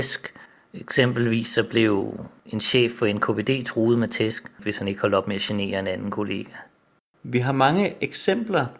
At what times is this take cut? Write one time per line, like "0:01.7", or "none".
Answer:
0:04.6
0:07.2